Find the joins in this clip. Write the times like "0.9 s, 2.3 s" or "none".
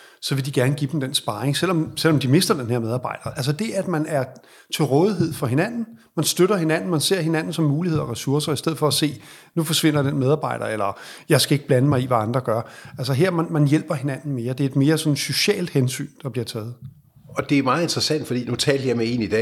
none